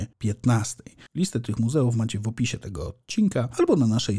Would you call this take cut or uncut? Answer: uncut